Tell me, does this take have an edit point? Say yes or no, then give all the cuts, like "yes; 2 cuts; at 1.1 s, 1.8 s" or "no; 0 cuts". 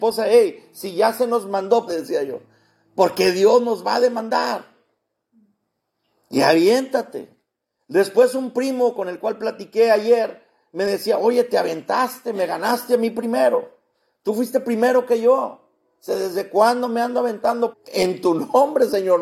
yes; 2 cuts; at 1.9 s, 17.7 s